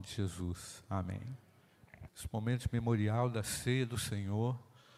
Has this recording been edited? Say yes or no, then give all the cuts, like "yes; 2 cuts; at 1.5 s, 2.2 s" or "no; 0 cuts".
yes; 1 cut; at 2.1 s